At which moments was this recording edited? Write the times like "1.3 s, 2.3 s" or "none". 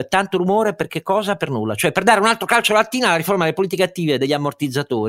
none